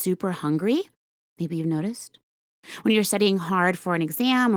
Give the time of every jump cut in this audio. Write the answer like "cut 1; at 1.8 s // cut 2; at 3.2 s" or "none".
none